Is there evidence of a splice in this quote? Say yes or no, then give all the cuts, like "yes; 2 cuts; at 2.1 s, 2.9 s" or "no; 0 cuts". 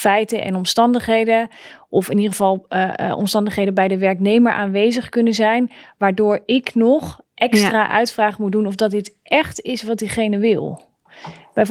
yes; 1 cut; at 7.3 s